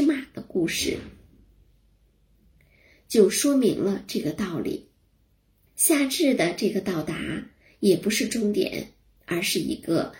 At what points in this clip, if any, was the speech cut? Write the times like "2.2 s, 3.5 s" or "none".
5.7 s, 9.2 s